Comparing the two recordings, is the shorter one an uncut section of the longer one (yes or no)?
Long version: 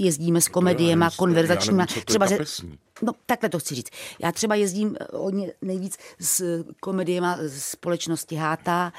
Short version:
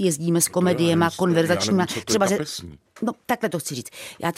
yes